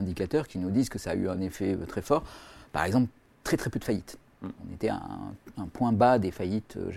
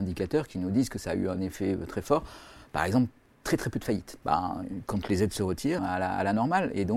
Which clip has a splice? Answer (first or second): second